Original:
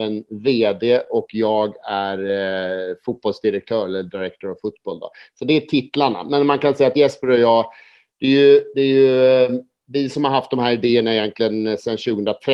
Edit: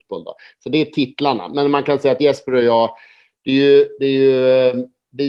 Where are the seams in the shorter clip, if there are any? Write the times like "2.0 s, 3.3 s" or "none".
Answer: none